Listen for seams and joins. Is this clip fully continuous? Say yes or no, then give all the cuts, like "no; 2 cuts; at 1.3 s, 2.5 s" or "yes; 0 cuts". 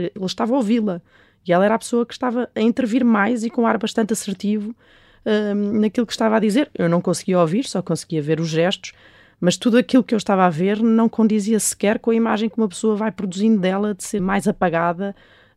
no; 1 cut; at 14.2 s